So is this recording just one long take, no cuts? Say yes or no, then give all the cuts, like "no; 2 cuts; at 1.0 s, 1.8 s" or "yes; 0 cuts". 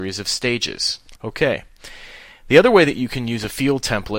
no; 1 cut; at 1.2 s